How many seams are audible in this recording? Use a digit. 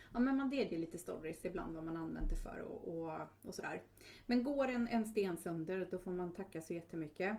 0